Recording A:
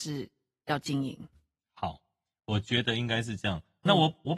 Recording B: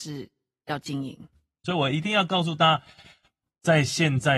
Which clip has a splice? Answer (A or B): B